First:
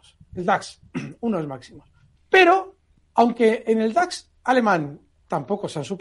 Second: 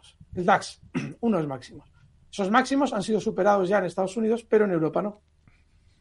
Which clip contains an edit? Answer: first; 1 cut; at 2.2 s

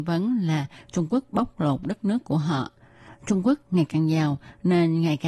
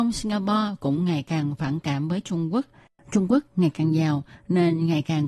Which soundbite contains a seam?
first; 1 cut; at 3.1 s

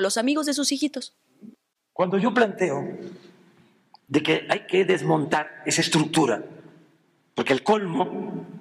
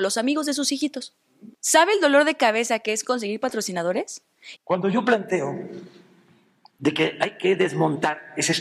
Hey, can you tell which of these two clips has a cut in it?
second; 2 cuts; at 1.6 s, 4.6 s

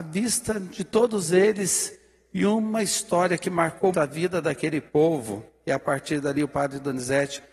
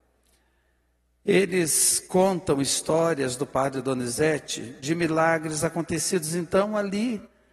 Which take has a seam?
first; 1 cut; at 3.9 s

